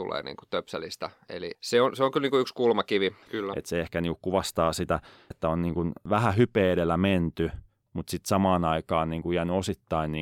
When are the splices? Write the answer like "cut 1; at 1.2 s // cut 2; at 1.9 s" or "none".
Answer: cut 1; at 3.2 s // cut 2; at 5.3 s